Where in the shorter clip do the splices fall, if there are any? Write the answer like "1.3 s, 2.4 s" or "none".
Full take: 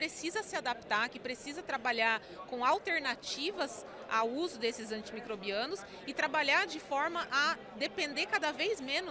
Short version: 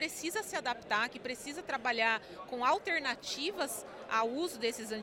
none